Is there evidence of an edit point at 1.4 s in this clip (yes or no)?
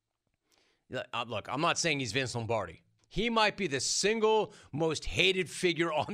no